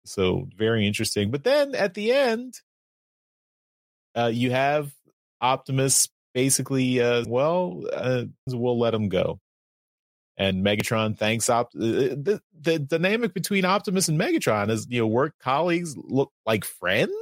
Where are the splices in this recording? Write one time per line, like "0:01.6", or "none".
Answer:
0:07.2
0:08.5